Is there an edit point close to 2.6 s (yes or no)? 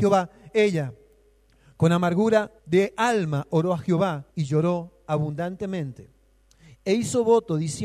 yes